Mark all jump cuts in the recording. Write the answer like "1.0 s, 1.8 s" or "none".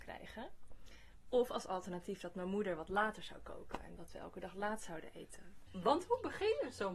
4.0 s, 5.7 s